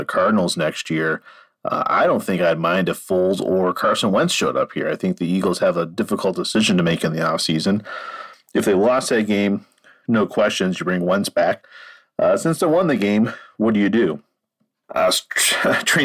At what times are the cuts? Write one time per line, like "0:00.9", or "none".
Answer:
0:14.8